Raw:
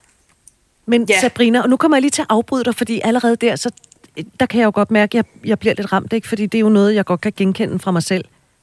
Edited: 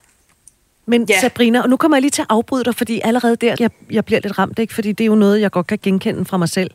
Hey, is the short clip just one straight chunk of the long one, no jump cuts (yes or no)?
no